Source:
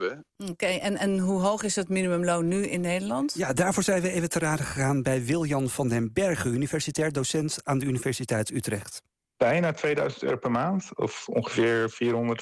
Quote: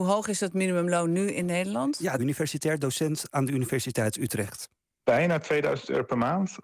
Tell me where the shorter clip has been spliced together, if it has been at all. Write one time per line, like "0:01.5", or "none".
0:02.2